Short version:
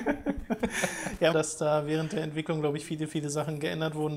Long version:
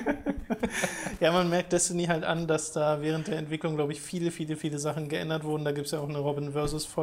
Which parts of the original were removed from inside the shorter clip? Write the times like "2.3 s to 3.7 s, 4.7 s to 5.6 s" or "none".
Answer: 1.3 s to 2.5 s, 4.0 s to 4.3 s